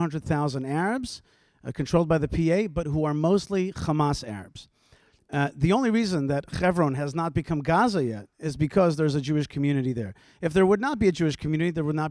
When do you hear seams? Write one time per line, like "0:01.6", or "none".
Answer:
none